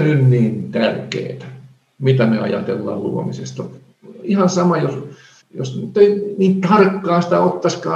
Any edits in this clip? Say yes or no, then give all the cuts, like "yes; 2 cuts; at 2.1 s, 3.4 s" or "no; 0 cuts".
yes; 1 cut; at 5.4 s